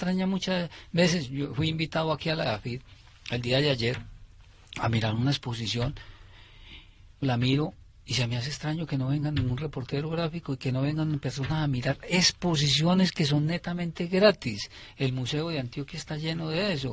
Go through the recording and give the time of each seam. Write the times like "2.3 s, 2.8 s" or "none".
7.2 s